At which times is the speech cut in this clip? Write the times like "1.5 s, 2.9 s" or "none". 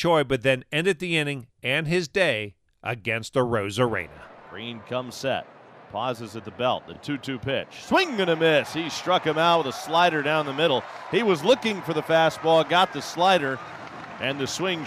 none